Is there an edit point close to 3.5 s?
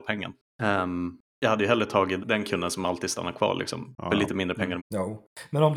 no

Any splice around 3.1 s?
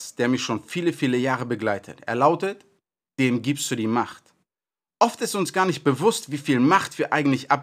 yes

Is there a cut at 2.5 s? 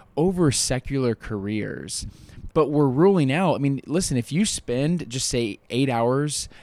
yes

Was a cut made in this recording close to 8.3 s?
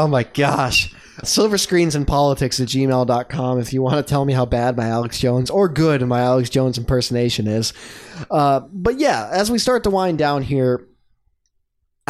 no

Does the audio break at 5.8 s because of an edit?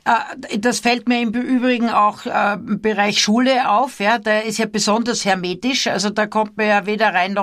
no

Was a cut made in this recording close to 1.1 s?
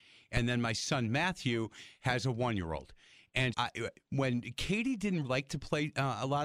no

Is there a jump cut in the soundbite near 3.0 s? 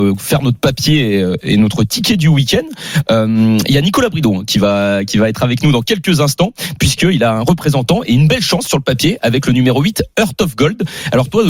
no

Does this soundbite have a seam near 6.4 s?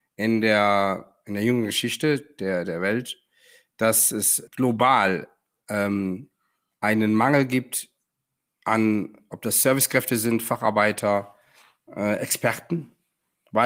no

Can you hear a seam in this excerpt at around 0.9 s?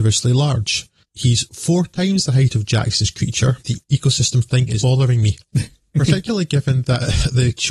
no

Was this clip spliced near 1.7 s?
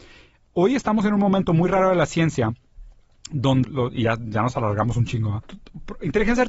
no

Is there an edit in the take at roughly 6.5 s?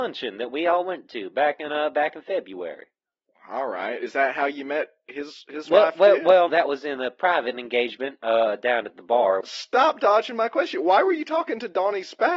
yes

